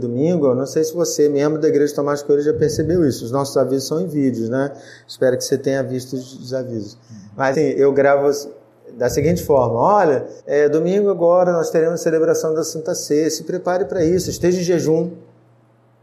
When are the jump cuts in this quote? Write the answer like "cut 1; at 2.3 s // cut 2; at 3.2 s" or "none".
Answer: cut 1; at 7.5 s // cut 2; at 10.4 s

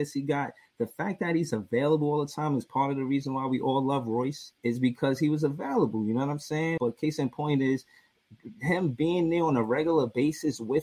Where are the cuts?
cut 1; at 4.6 s // cut 2; at 6.8 s

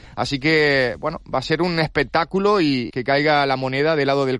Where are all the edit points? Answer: cut 1; at 2.9 s

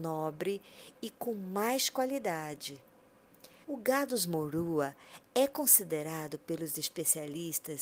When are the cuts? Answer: cut 1; at 3.6 s

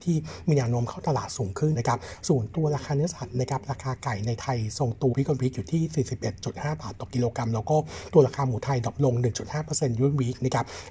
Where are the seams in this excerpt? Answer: cut 1; at 1.7 s // cut 2; at 5.1 s

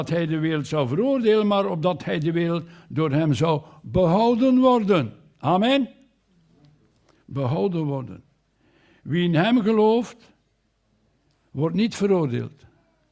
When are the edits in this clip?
none

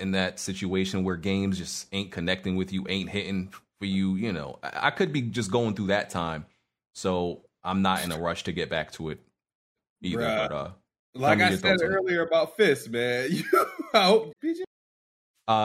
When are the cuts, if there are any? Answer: cut 1; at 14.3 s

